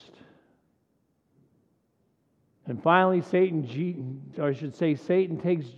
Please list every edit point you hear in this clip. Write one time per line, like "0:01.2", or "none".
0:04.3

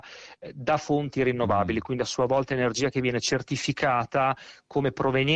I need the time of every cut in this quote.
none

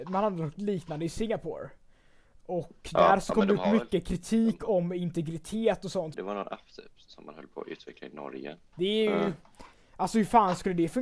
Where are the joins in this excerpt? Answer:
0:06.1
0:08.7

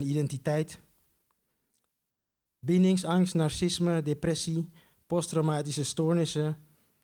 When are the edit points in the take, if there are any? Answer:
none

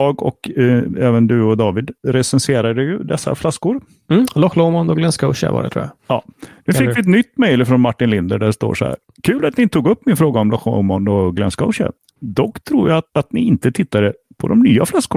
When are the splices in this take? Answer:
none

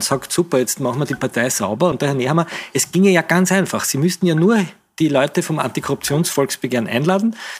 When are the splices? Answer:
none

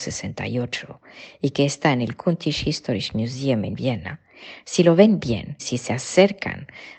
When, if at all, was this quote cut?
0:05.6

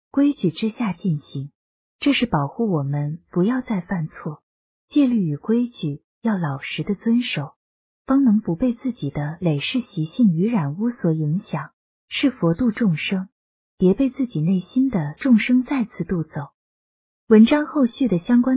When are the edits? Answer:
none

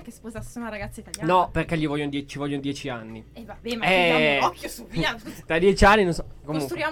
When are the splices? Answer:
none

